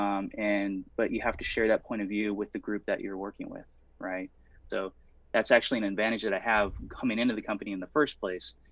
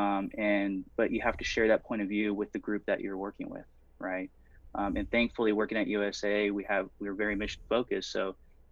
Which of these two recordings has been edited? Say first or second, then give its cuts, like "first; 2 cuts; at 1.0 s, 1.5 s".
first; 1 cut; at 4.7 s